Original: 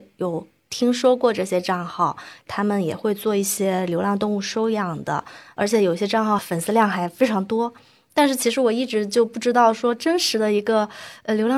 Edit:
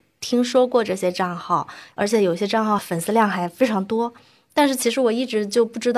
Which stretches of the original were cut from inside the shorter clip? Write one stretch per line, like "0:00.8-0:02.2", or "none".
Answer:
0:02.4-0:05.5